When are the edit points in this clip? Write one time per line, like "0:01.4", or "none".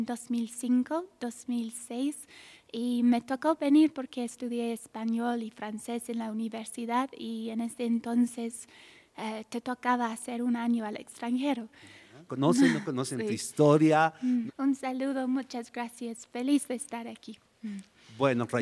0:12.3
0:14.5